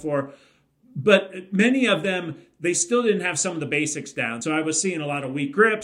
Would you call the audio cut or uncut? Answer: uncut